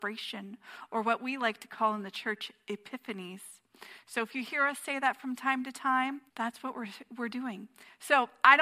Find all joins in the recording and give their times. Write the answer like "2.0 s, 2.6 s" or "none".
6.3 s